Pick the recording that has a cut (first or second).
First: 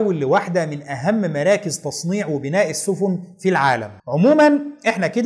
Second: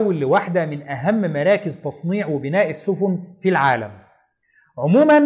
first